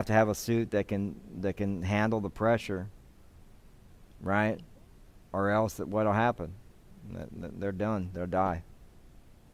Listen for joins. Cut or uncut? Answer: uncut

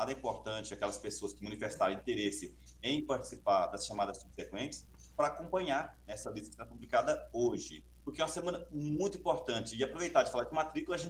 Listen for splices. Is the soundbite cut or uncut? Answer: cut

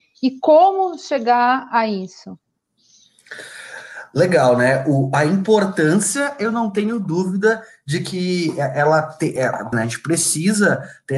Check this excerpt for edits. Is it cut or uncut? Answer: cut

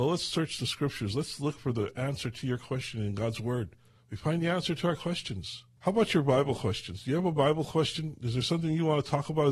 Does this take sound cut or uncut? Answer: cut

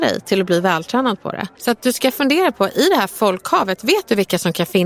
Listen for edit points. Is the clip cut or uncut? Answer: cut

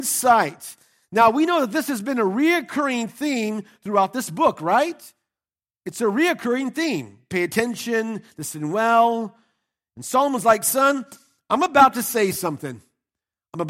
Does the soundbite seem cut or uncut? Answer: uncut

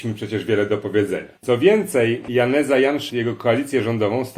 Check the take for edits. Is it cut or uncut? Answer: cut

